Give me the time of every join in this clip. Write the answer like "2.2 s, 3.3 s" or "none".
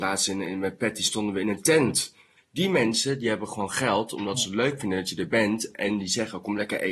2.4 s